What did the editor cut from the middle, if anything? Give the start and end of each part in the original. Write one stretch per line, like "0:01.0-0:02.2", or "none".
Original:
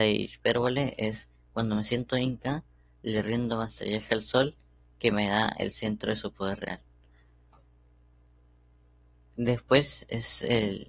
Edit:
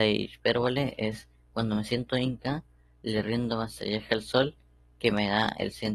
none